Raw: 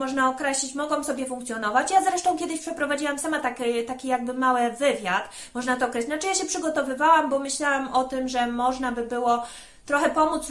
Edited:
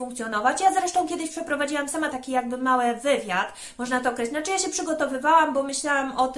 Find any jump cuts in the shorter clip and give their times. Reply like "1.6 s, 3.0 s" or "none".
2.1 s